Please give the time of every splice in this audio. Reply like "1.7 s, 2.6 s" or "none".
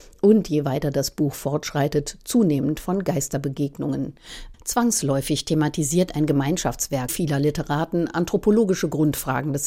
4.5 s, 7.1 s

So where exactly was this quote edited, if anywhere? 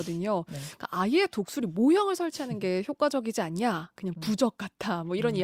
4.0 s

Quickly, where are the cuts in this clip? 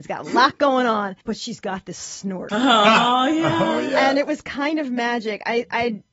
1.2 s, 2.5 s

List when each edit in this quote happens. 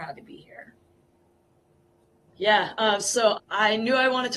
2.3 s, 3.4 s

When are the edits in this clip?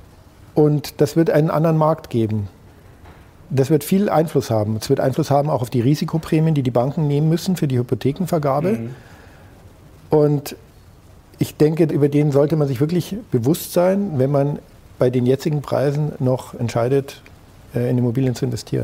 11.9 s, 16.6 s

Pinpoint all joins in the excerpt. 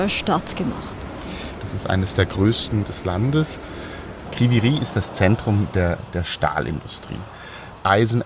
1.6 s, 2.8 s, 4.2 s

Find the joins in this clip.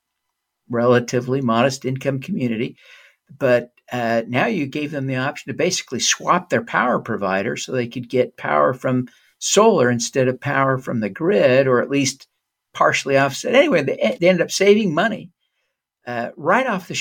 14.2 s

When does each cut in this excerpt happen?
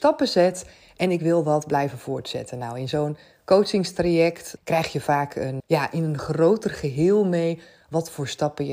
4.6 s, 5.6 s

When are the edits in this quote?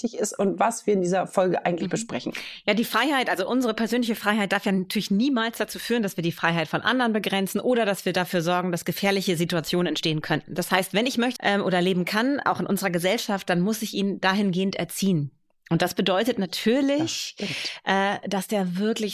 11.4 s

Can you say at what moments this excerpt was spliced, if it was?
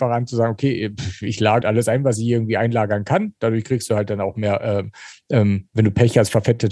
1.6 s

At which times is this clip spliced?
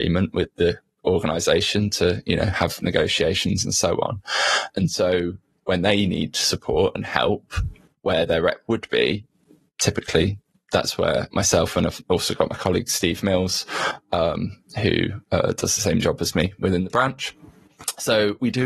none

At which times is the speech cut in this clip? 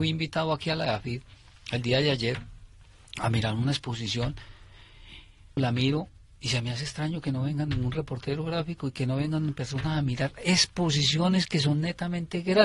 5.6 s

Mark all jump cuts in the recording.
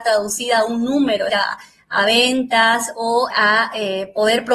1.3 s, 3.3 s

